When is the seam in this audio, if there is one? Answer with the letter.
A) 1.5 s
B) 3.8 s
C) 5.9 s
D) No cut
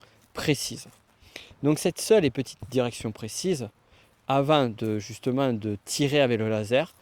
D